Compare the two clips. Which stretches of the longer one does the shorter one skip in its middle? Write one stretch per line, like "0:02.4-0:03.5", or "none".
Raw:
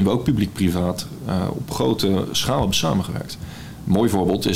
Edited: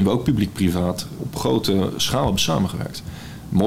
0:01.2-0:01.5